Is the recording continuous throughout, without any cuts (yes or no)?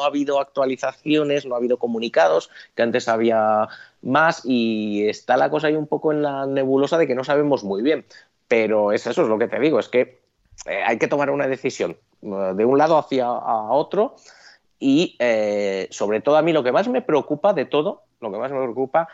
yes